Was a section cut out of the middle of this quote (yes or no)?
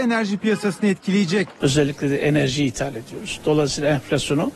yes